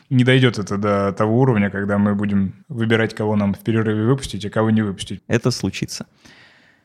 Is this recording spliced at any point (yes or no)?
yes